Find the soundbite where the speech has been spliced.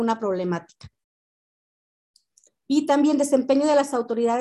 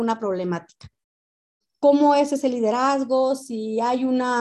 second; 1 cut; at 1.6 s

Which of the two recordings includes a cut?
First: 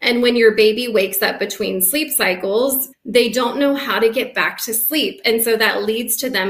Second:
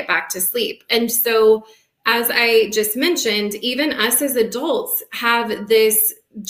first; 1 cut; at 2.9 s

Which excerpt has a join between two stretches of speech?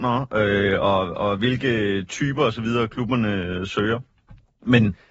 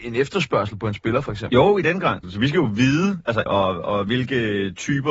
second; 2 cuts; at 2.2 s, 3.5 s

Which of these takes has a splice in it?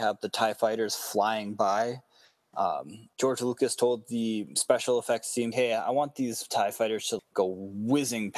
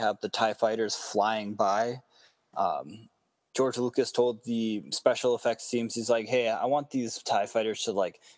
first; 3 cuts; at 3.1 s, 5.5 s, 7.2 s

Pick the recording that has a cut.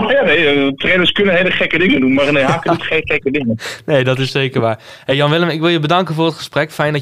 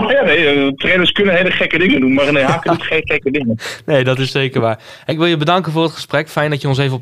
second; 1 cut; at 5.1 s

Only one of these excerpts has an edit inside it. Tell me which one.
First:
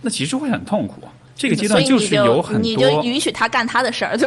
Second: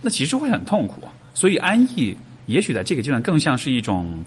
first; 1 cut; at 1.3 s

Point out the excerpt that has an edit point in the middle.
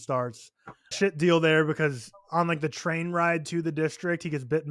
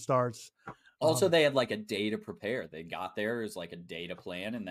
first; 1 cut; at 0.9 s

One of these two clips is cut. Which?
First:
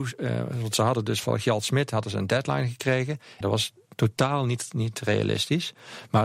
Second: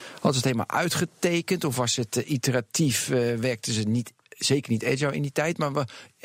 first; 2 cuts; at 1.2 s, 3.4 s

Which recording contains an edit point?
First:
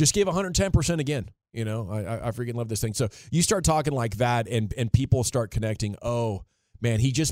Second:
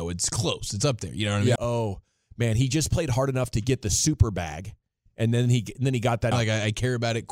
second; 2 cuts; at 1.6 s, 6.3 s

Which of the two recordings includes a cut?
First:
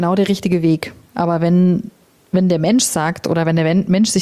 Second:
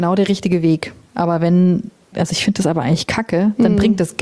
second; 1 cut; at 2.1 s

